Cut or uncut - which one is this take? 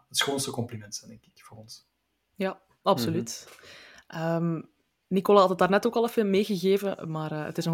uncut